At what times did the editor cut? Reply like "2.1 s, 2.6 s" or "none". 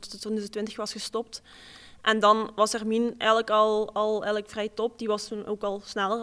none